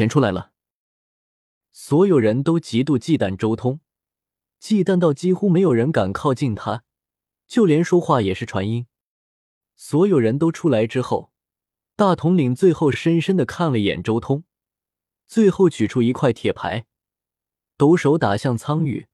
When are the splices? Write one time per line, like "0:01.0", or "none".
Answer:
none